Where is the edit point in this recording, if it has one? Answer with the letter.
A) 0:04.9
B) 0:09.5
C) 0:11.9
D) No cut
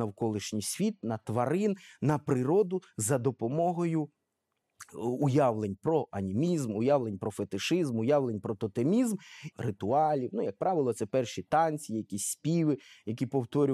B